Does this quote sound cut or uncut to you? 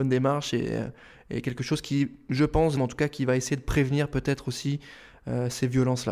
cut